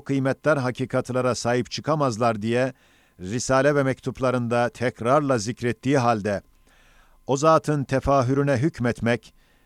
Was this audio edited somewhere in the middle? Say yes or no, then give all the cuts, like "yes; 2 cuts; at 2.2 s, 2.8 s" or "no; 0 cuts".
no; 0 cuts